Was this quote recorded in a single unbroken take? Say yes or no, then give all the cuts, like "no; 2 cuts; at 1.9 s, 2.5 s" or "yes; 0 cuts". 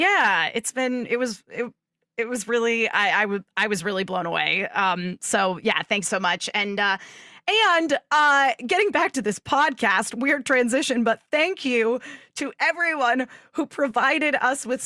yes; 0 cuts